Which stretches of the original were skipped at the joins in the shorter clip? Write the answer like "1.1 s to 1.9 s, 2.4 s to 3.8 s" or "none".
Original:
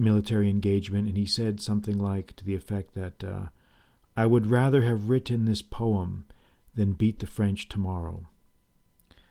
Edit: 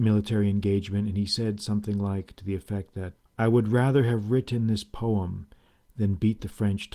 3.2 s to 4.0 s